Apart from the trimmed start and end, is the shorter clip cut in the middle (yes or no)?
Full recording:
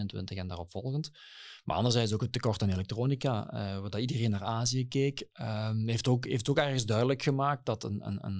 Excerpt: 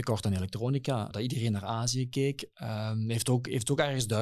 yes